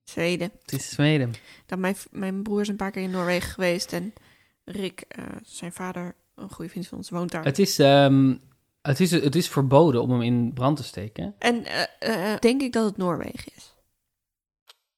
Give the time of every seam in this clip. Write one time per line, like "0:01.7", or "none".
0:11.4
0:12.4